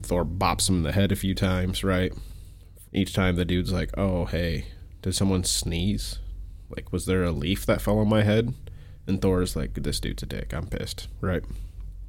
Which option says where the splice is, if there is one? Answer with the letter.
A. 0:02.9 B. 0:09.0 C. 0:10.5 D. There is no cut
A